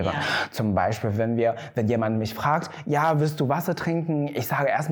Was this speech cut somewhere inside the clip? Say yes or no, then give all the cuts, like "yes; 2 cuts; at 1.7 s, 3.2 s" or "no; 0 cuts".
no; 0 cuts